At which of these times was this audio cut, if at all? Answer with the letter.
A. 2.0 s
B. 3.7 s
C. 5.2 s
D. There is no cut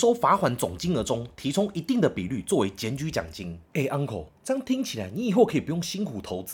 B